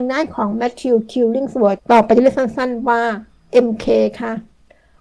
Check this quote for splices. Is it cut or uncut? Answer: cut